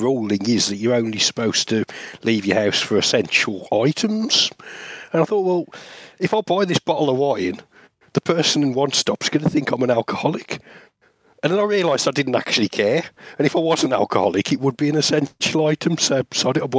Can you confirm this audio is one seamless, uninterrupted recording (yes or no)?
yes